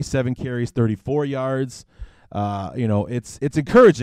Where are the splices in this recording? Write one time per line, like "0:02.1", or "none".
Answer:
none